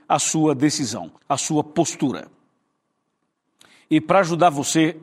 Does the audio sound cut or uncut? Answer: cut